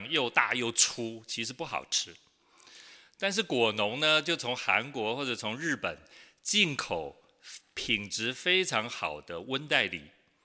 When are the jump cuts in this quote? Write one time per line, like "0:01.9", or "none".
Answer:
none